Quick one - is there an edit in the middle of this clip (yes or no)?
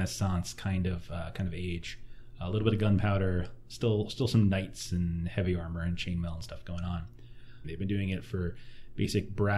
yes